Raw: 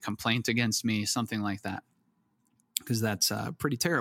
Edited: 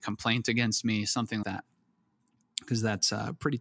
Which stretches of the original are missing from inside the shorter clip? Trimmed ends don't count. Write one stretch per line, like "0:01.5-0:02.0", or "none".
0:01.4-0:01.6